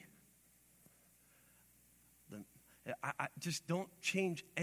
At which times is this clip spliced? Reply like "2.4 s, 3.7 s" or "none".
3.1 s